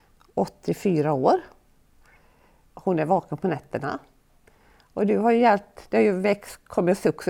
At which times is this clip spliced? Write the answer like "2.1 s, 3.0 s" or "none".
2.7 s